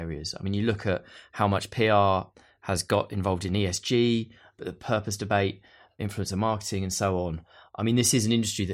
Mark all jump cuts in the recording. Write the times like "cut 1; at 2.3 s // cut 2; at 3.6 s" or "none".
none